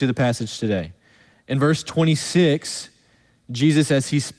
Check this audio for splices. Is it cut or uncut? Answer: uncut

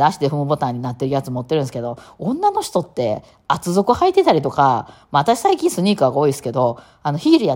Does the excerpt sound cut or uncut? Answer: uncut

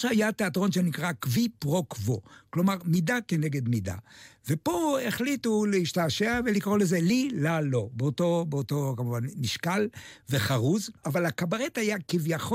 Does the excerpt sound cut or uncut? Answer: uncut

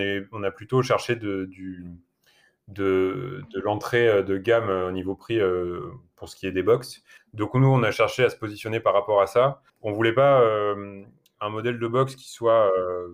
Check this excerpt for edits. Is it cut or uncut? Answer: cut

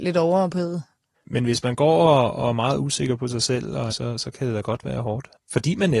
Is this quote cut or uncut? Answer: cut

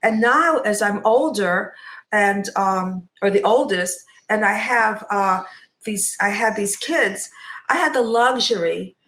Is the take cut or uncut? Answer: uncut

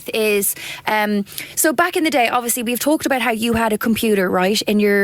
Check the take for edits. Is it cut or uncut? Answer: uncut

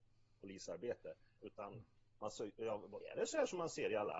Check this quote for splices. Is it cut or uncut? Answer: cut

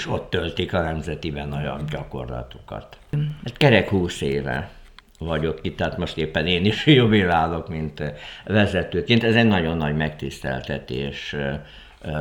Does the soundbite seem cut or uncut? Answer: cut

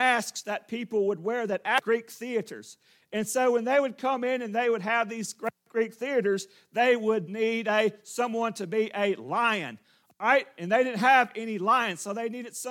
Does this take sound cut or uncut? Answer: uncut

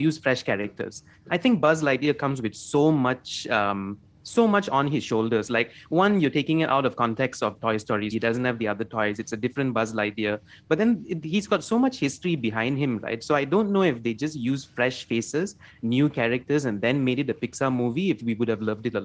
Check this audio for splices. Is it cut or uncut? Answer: cut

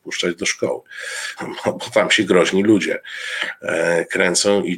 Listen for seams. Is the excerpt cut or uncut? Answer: cut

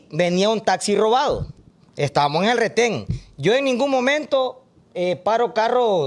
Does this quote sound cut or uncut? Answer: uncut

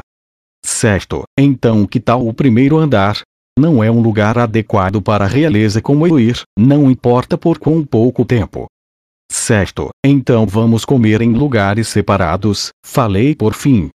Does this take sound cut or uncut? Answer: cut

